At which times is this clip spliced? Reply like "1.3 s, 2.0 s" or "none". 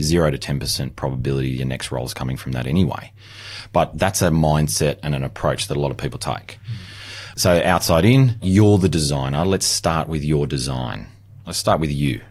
8.4 s